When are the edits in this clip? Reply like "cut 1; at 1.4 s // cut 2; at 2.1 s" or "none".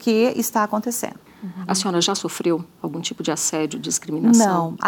cut 1; at 1.7 s